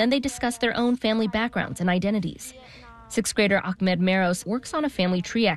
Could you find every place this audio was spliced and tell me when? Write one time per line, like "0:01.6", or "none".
0:04.4